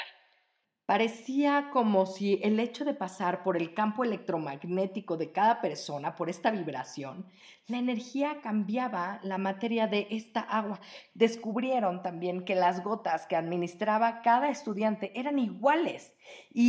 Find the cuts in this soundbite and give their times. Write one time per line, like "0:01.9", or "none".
0:11.1